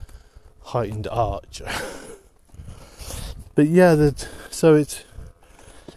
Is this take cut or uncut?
uncut